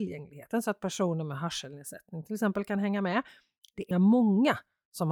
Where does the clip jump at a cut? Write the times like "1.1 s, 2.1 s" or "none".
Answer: 3.9 s

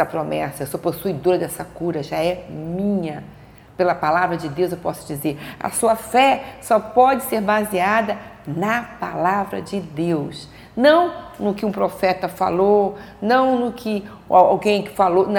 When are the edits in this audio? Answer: none

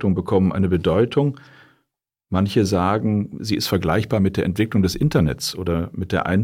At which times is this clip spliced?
none

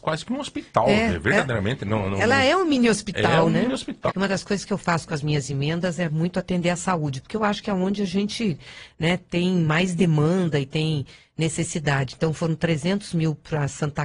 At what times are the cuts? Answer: 4.1 s

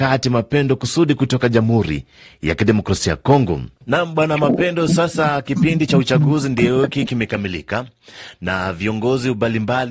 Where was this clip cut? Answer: none

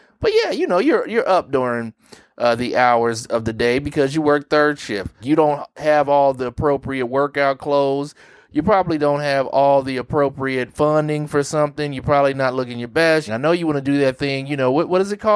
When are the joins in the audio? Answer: 5.2 s, 13.3 s

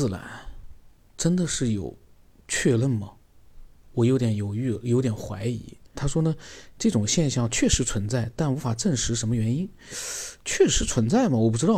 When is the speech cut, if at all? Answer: 5.9 s

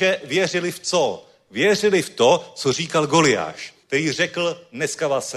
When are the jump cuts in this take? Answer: 3.8 s

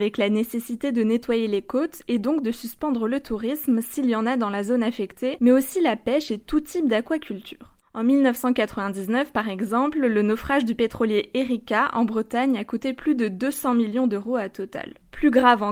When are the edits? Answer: none

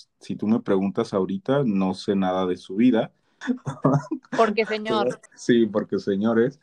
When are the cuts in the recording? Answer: 3.4 s, 5.3 s

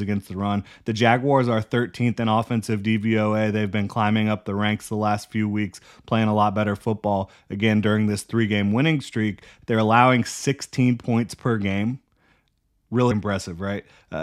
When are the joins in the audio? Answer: 9.6 s, 13.1 s

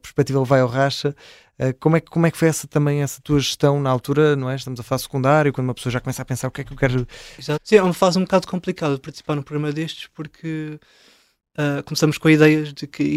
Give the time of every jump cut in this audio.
7.6 s

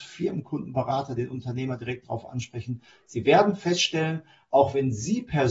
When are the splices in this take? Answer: none

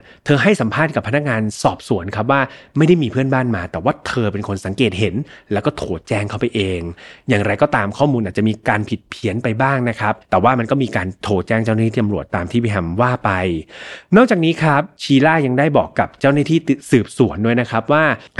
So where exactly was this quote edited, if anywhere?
10.2 s

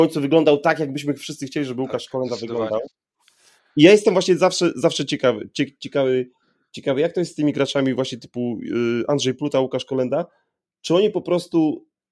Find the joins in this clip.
none

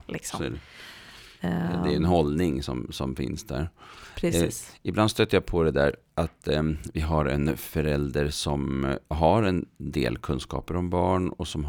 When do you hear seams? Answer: none

